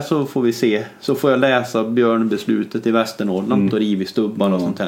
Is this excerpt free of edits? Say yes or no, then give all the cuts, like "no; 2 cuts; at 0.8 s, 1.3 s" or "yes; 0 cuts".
no; 1 cut; at 3.7 s